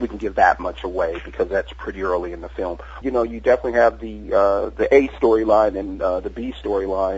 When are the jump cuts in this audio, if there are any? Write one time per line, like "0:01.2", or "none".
0:03.0